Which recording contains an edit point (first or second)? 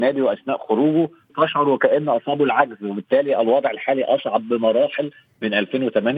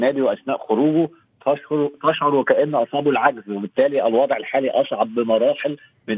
first